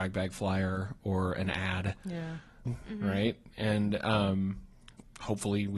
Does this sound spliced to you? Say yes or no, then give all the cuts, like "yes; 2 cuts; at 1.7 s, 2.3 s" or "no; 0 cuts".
yes; 1 cut; at 2.7 s